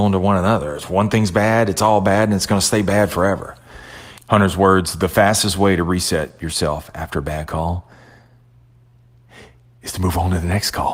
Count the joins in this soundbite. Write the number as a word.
one